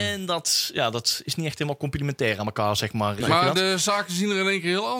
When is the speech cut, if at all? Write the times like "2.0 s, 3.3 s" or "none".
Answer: 3.2 s

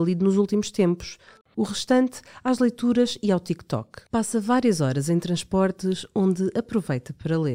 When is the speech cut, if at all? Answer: 1.4 s, 4.1 s

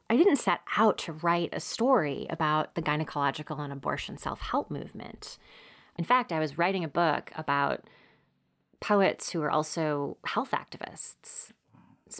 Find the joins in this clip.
none

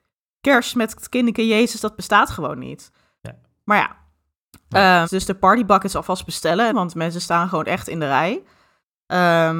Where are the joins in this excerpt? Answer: 5.0 s, 6.7 s

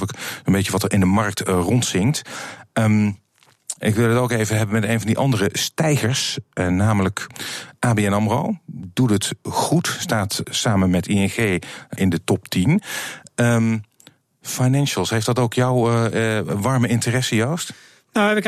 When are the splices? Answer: 10.4 s, 12.0 s

